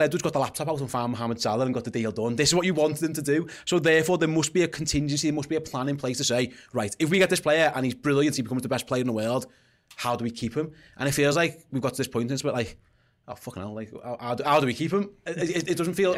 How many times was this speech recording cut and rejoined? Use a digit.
0